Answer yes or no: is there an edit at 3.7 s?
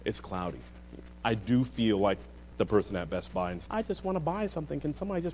yes